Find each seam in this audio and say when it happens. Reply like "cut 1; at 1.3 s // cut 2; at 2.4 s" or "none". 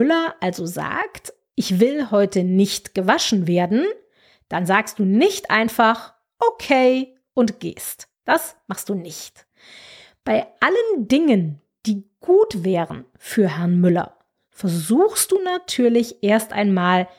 none